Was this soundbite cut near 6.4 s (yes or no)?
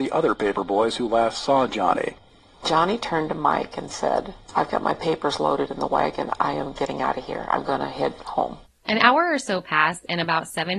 yes